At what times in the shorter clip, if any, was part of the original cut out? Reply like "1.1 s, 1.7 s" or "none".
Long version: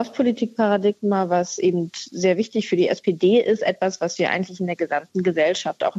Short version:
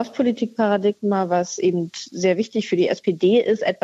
none